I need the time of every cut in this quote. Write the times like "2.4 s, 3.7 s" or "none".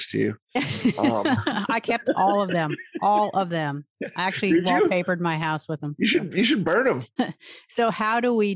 7.2 s